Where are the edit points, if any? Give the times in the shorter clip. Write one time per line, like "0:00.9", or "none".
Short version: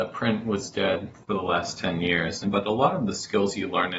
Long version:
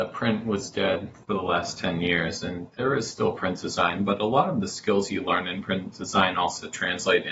0:02.4